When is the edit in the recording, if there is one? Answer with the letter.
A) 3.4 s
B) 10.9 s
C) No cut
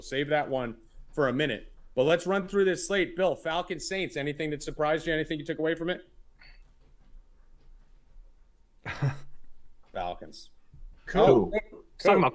B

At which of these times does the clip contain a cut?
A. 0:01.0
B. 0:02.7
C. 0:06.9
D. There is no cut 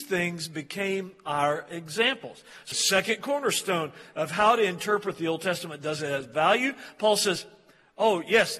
B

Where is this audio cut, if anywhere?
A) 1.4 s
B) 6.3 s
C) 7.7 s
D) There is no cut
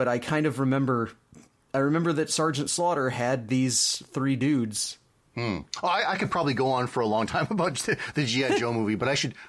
D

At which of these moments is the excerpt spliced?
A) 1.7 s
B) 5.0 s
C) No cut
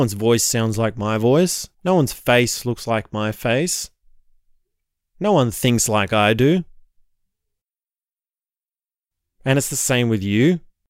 A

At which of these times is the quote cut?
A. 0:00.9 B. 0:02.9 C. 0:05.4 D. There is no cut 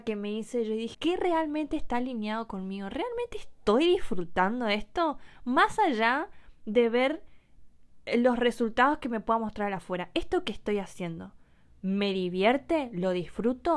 A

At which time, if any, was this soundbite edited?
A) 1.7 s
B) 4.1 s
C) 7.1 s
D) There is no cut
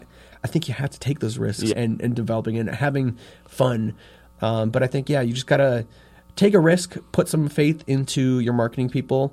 A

